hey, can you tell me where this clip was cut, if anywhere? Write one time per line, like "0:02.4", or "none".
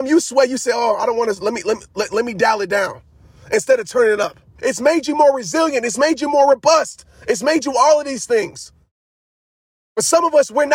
0:04.6